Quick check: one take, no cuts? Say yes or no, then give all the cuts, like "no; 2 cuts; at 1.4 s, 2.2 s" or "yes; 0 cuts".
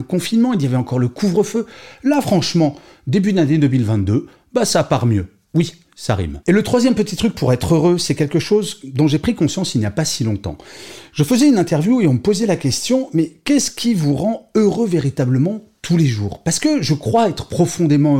yes; 0 cuts